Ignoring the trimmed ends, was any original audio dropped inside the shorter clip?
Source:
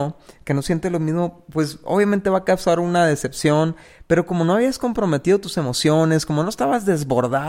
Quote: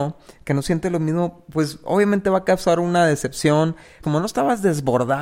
yes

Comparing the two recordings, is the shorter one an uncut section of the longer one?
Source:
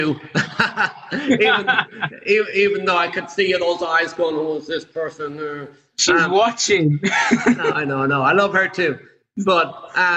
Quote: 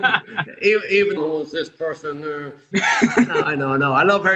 no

